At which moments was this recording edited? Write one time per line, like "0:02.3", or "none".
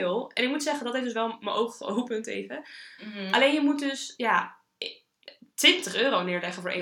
0:03.0